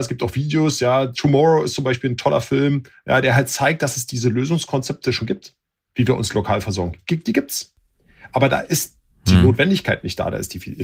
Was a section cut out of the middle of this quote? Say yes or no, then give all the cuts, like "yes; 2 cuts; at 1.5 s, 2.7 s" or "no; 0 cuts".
no; 0 cuts